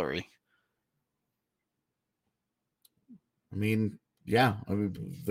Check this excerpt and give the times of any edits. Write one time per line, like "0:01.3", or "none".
none

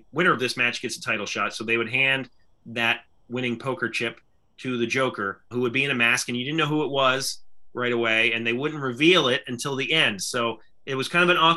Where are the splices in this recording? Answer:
0:05.5

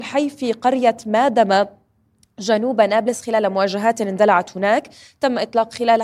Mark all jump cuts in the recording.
none

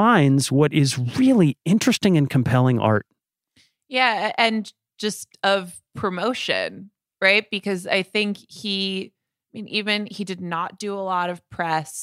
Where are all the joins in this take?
none

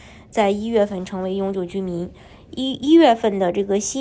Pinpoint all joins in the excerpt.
none

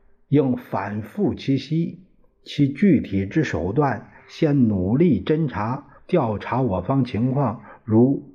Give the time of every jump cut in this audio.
0:06.0

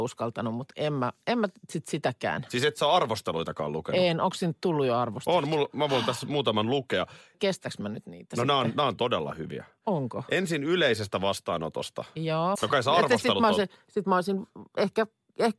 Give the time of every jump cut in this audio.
0:07.3
0:12.5

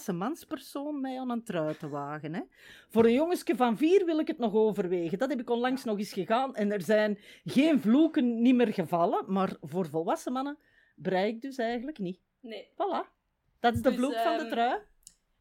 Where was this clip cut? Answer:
none

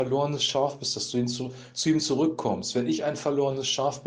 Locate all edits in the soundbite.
none

